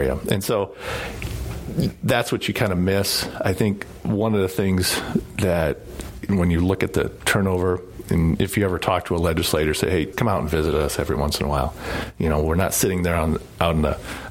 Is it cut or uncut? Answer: cut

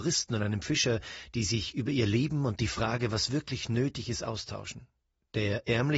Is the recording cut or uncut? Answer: uncut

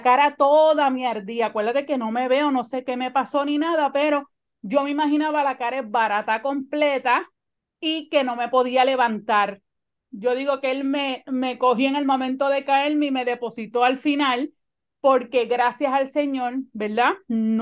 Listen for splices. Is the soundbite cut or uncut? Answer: cut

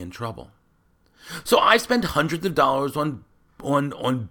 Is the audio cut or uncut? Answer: uncut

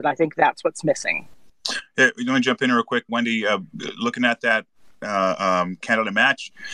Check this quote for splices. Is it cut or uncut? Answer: cut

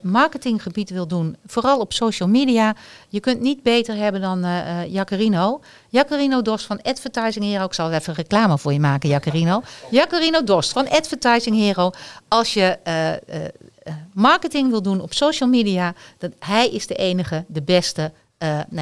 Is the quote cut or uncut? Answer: cut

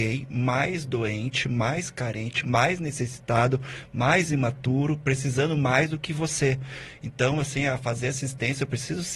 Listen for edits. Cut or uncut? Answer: uncut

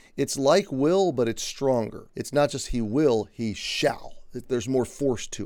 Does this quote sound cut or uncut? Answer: cut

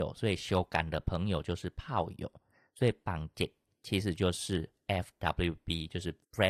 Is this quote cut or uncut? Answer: uncut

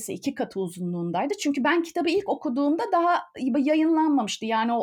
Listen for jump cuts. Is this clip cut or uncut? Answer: uncut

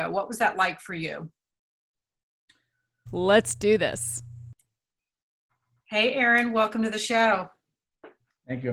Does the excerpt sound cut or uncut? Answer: cut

